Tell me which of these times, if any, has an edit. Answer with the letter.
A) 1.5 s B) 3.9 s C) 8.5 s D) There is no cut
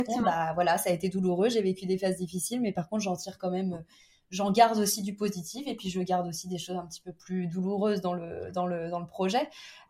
D